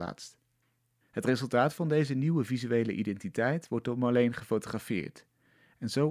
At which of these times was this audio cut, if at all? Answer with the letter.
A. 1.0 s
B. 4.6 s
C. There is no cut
A